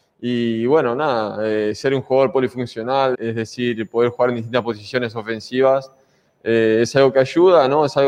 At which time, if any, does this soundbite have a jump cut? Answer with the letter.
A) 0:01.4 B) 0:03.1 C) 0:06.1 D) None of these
B